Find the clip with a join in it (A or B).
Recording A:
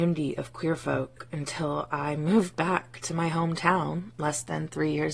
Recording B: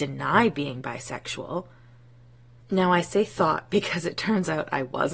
B